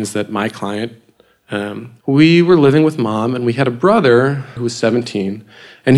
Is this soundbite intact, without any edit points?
no; 2 cuts; at 2.0 s, 4.6 s

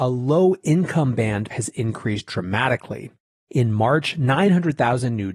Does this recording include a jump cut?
yes; 1 cut; at 1.5 s

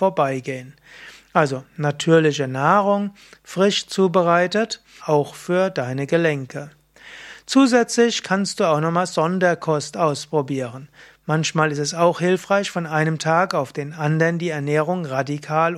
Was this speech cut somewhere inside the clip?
yes; 1 cut; at 5.0 s

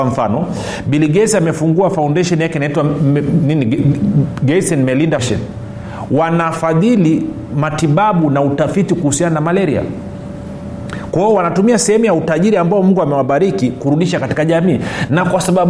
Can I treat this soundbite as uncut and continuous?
no; 1 cut; at 5.2 s

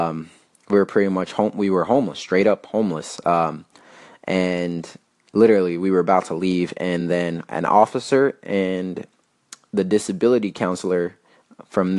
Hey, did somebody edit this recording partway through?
no; 0 cuts

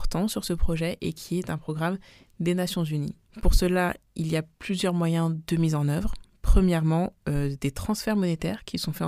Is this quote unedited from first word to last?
no; 1 cut; at 3.3 s

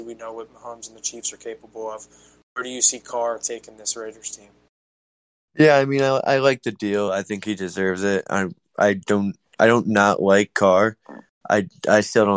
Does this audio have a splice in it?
no; 0 cuts

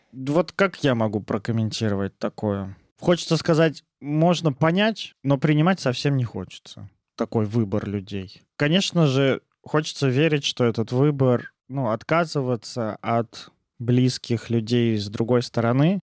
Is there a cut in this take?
no; 0 cuts

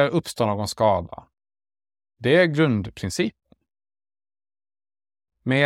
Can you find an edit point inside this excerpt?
yes; 1 cut; at 2.2 s

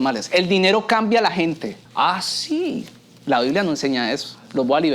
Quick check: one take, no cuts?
no; 1 cut; at 1.9 s

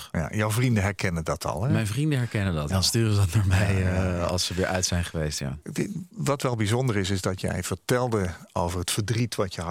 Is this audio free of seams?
no; 1 cut; at 2.7 s

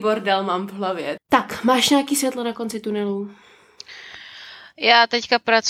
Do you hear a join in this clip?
yes; 1 cut; at 1.2 s

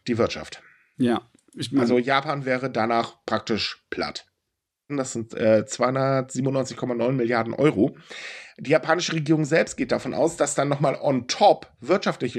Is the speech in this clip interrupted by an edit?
yes; 1 cut; at 4.9 s

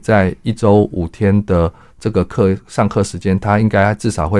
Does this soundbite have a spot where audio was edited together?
no; 0 cuts

